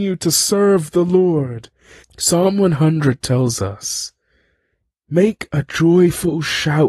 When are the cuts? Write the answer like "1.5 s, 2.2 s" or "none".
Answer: 2.0 s